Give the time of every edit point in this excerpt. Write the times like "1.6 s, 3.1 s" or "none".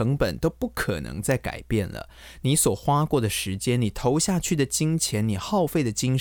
none